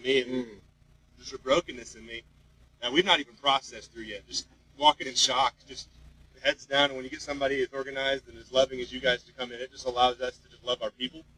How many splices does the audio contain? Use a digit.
0